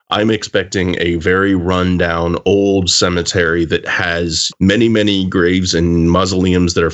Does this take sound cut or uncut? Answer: cut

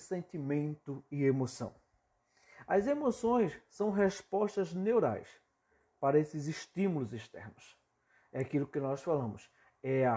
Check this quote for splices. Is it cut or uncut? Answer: uncut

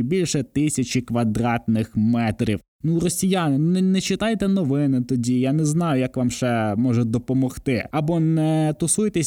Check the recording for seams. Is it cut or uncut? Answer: uncut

